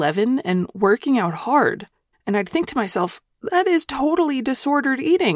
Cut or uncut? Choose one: cut